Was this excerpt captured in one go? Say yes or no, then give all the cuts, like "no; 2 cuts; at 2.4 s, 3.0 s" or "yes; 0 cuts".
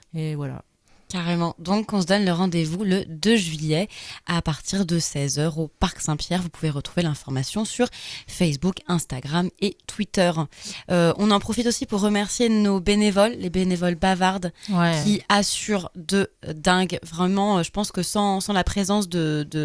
yes; 0 cuts